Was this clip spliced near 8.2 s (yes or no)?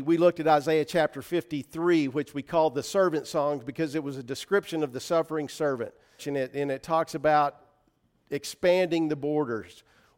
no